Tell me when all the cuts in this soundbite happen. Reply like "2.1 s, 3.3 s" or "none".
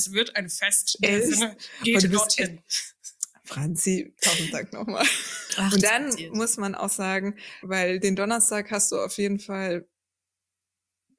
5.5 s, 7.6 s